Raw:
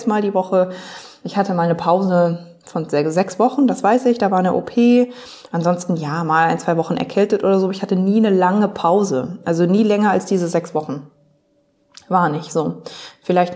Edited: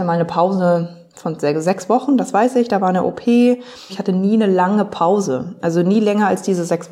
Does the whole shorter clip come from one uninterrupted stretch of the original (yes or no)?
no